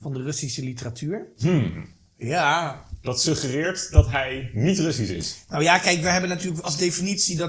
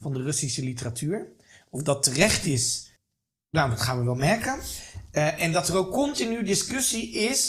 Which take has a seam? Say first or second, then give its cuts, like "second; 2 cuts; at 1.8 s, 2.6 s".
first; 1 cut; at 1.4 s